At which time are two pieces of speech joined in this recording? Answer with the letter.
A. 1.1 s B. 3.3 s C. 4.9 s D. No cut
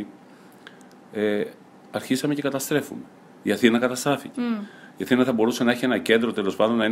D